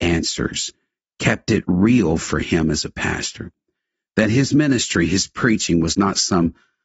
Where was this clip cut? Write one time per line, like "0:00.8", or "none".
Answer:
none